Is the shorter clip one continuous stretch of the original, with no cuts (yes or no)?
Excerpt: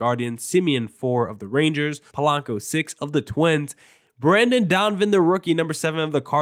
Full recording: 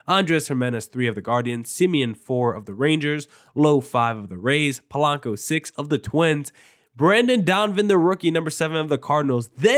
no